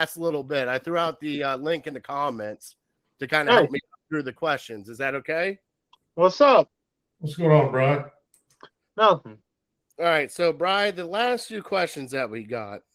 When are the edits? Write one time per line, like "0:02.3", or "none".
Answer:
none